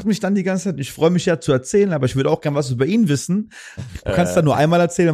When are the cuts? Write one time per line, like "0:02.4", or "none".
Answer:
0:03.8